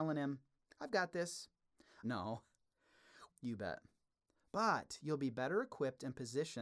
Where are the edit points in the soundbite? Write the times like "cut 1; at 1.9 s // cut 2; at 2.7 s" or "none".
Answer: cut 1; at 2.0 s // cut 2; at 3.3 s

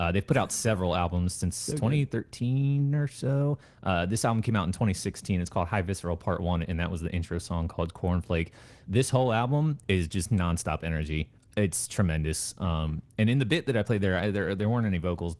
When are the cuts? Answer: none

